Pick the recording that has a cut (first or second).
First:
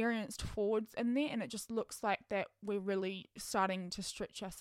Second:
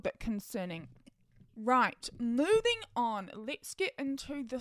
second